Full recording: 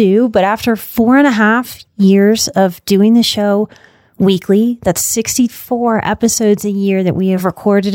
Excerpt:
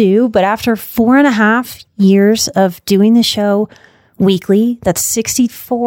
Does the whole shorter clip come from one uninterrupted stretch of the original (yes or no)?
yes